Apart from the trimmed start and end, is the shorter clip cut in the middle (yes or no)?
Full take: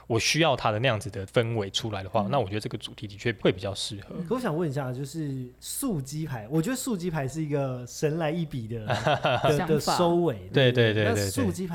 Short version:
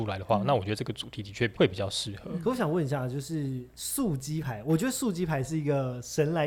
no